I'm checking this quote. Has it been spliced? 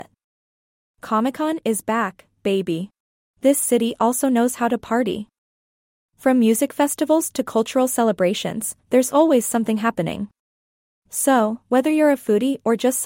yes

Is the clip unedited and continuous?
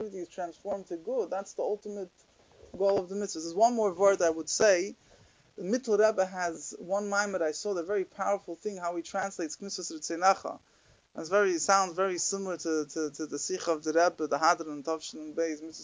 yes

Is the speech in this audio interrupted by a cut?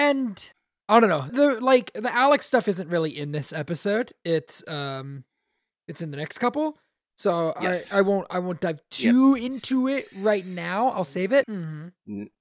yes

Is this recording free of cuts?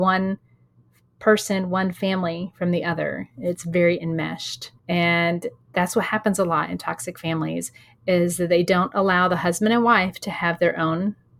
no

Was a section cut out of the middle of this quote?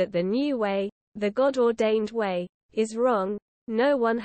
no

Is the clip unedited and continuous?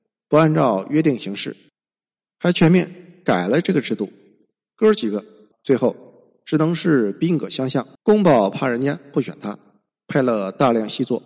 no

